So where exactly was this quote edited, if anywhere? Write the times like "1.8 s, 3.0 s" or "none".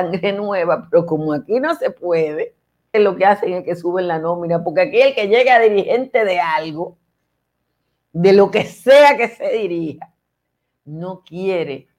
2.9 s